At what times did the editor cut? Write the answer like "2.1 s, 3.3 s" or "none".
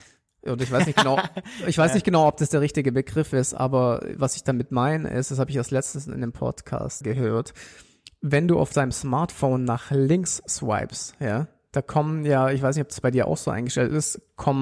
7.0 s

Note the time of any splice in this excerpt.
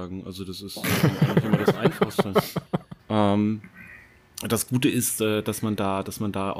3.0 s

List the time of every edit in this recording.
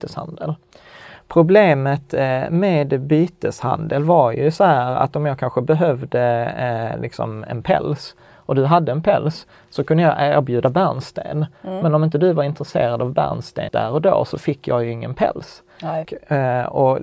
13.7 s, 16.1 s

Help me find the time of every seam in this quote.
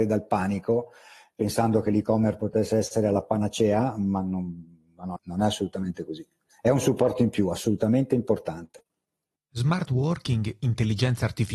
5.2 s

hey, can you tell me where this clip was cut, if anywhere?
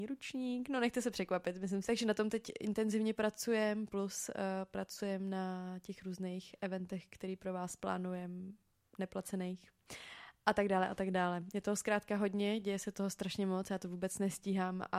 1.9 s

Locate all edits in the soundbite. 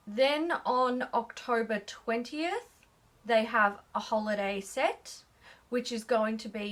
none

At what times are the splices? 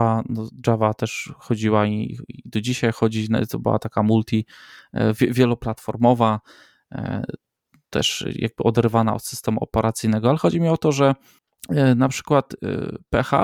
none

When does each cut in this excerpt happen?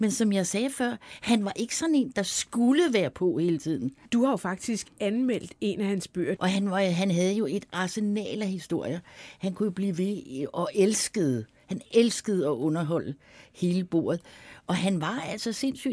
6.4 s

